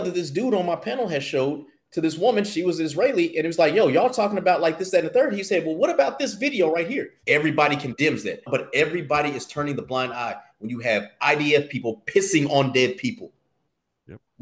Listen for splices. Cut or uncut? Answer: cut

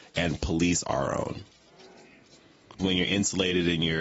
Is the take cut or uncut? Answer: cut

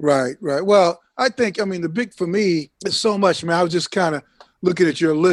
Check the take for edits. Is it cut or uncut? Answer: cut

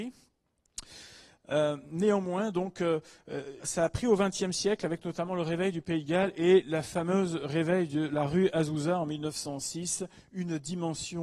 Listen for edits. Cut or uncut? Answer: cut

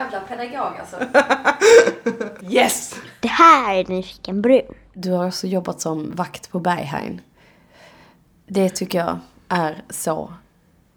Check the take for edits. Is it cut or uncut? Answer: cut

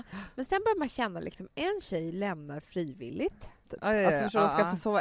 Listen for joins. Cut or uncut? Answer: cut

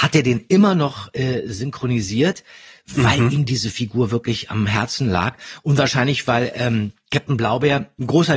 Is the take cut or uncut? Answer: uncut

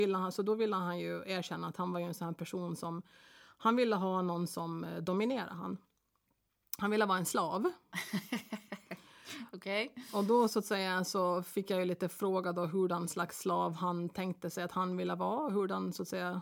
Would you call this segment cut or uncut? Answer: uncut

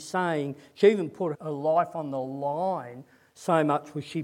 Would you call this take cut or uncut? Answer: cut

